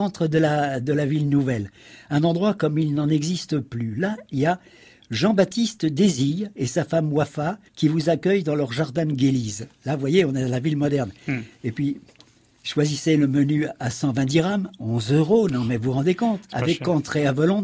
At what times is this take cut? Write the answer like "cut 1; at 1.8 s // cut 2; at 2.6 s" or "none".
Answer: cut 1; at 7.7 s